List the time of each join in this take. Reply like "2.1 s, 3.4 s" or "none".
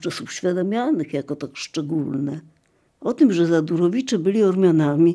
2.9 s